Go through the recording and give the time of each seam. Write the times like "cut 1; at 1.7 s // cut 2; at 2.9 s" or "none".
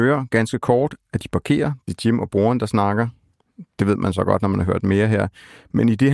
none